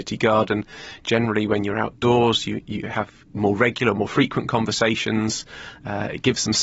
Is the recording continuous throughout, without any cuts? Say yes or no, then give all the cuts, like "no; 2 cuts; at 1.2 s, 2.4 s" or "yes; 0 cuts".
no; 1 cut; at 3.2 s